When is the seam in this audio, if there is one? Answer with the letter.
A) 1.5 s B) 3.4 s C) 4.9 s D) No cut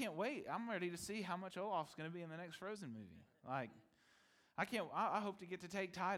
D